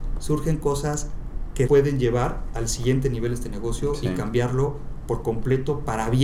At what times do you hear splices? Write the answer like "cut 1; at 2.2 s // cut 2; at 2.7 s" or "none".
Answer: cut 1; at 1.7 s